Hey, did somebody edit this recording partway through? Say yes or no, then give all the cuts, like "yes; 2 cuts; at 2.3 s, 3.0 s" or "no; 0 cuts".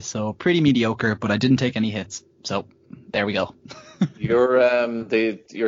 no; 0 cuts